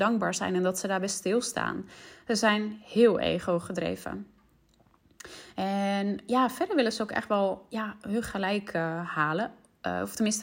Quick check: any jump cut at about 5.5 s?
no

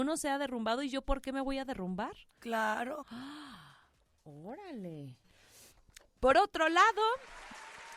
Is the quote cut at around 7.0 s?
no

